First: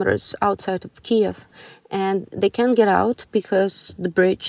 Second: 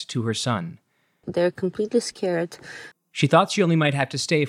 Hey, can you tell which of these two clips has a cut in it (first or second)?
second